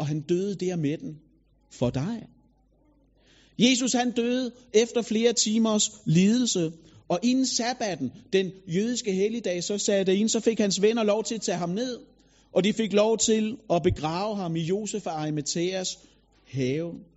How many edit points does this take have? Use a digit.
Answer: 0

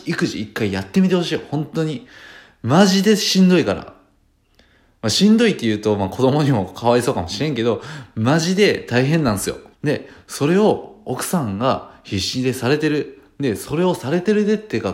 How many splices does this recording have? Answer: 1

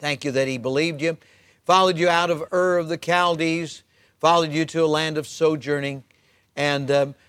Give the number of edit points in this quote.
0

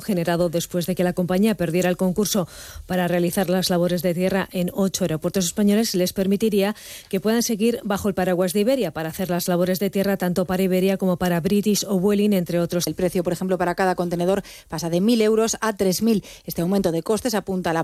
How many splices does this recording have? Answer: 1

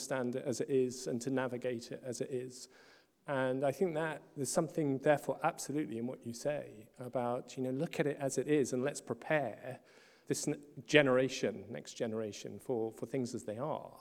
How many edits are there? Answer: 1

